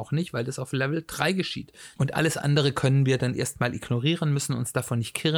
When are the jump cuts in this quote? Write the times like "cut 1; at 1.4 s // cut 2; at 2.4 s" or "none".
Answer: cut 1; at 2.0 s